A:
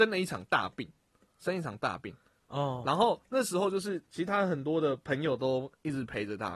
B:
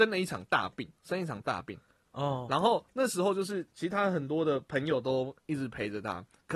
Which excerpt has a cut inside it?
B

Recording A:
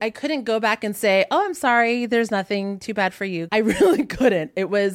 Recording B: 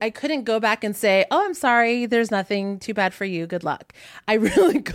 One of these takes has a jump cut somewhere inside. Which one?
A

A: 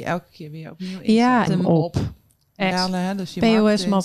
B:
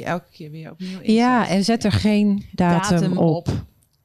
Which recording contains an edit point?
A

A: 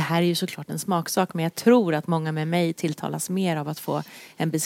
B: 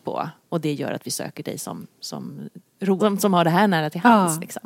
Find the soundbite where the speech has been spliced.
B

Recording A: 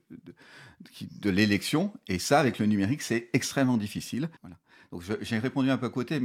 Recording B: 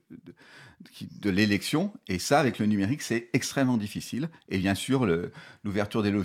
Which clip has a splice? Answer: A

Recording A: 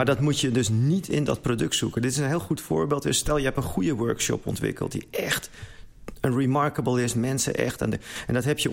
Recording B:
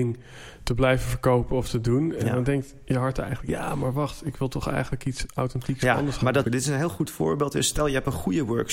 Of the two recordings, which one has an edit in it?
B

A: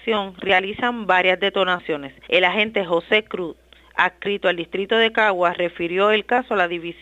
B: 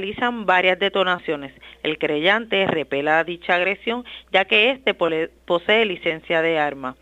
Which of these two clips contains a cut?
A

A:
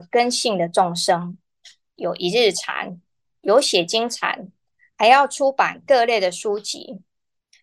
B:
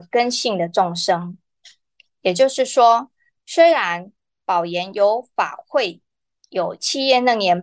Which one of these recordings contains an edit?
A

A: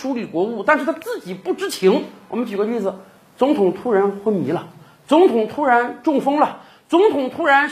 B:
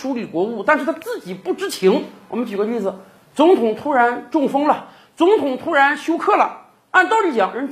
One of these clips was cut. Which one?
B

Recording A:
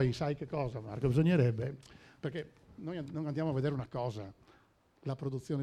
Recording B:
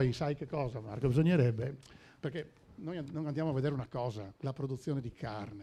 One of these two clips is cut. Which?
B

